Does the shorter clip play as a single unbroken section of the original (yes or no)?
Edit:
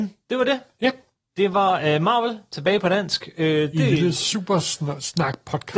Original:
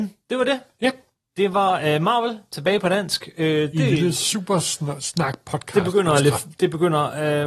yes